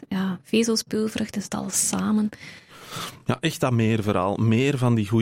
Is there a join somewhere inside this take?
no; 0 cuts

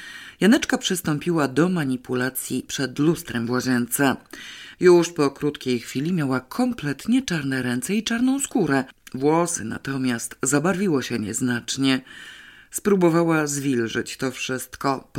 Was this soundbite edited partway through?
yes; 1 cut; at 4.7 s

